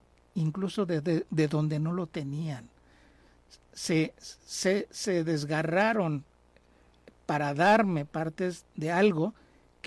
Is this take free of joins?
yes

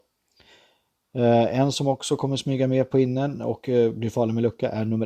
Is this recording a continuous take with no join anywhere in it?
yes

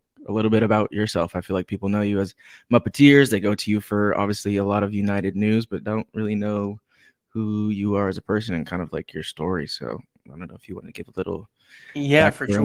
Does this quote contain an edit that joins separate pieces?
no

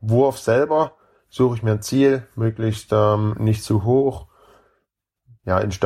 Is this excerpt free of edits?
yes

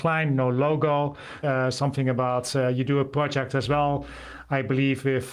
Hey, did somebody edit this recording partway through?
yes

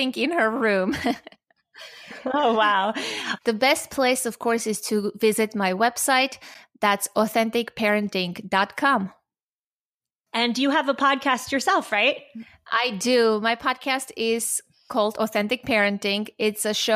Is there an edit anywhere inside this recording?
yes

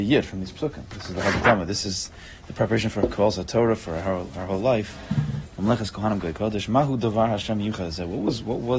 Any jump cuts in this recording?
no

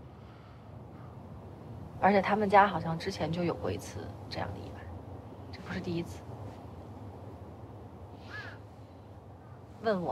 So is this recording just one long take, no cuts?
no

